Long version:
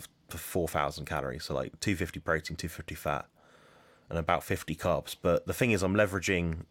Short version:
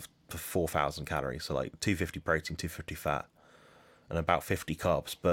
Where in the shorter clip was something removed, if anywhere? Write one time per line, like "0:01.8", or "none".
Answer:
none